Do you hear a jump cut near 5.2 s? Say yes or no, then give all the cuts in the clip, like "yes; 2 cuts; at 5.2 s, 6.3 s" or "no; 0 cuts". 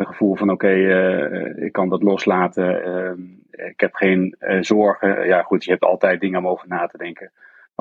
no; 0 cuts